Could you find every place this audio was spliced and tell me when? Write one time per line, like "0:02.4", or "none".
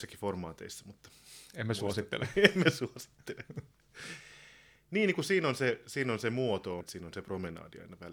0:06.8